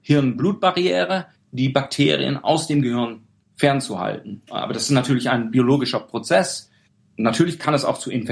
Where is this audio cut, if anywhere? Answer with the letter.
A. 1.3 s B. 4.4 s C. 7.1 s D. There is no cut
A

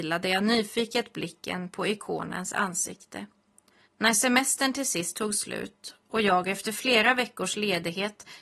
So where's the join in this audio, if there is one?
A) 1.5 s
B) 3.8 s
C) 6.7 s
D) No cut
B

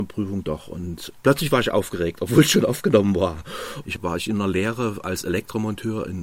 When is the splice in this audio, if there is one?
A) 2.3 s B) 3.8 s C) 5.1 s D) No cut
B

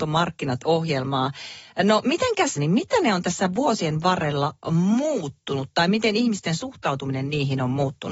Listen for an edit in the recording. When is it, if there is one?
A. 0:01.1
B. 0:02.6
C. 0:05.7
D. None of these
B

